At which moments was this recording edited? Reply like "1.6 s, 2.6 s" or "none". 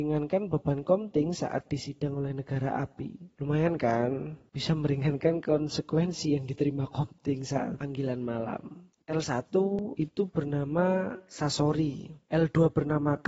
9.0 s